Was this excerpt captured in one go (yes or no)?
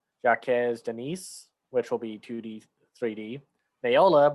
yes